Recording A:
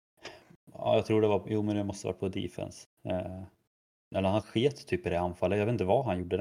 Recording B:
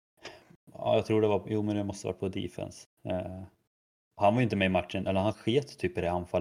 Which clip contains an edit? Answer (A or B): A